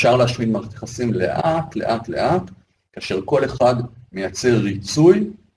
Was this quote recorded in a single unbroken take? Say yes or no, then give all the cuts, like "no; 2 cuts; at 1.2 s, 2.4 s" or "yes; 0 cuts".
yes; 0 cuts